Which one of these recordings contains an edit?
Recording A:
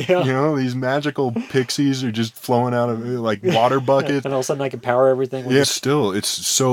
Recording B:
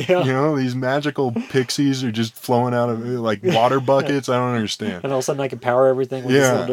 A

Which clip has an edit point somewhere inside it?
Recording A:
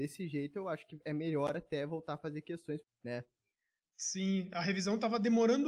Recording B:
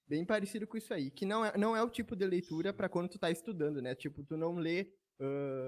A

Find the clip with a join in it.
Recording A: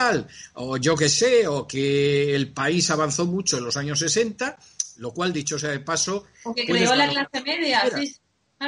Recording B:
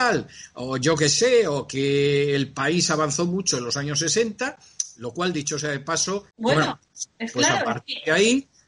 B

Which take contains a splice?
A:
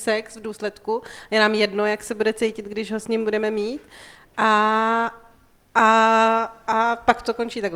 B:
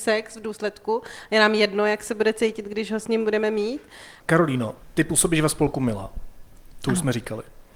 B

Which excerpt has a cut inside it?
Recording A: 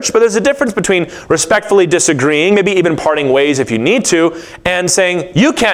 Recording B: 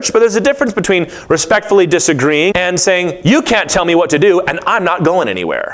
B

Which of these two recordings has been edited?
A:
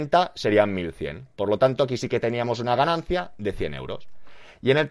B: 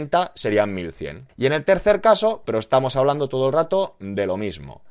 B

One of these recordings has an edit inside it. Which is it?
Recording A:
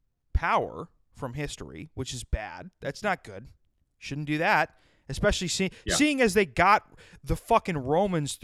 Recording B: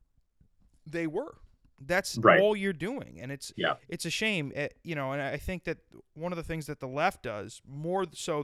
B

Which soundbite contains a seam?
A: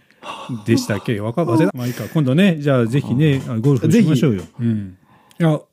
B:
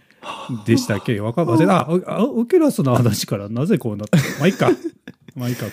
A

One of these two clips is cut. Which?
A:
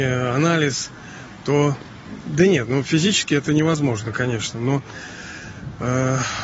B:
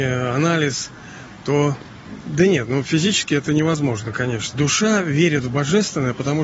B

